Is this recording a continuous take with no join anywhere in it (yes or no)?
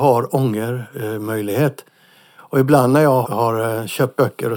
no